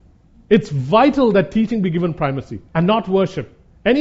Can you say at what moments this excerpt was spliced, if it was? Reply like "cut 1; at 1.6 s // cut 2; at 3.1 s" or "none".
cut 1; at 2.7 s